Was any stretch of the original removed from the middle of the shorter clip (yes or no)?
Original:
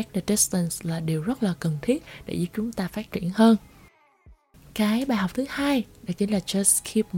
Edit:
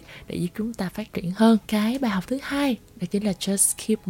yes